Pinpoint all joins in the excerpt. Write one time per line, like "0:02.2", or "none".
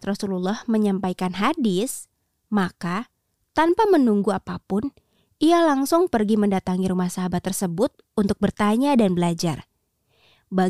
none

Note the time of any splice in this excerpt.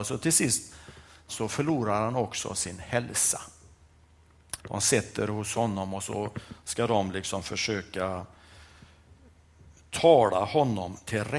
0:01.3
0:04.6

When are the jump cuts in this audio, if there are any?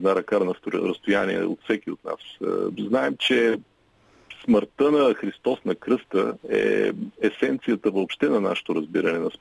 0:02.7
0:06.4

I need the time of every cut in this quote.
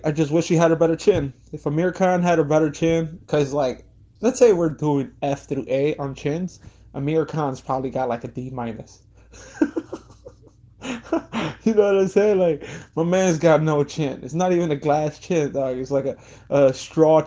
0:03.2

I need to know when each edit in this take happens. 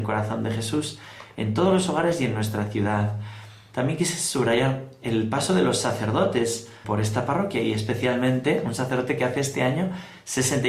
0:03.7
0:06.8

